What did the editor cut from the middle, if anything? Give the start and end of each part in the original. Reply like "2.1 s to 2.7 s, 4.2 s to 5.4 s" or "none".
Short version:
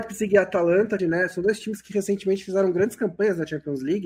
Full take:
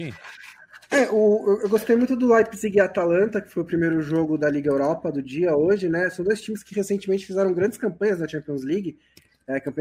3.4 s to 5.8 s